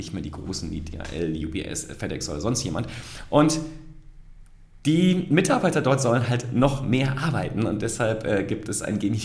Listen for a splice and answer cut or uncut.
uncut